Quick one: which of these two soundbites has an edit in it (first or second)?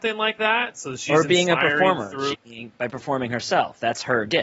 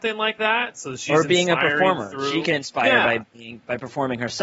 first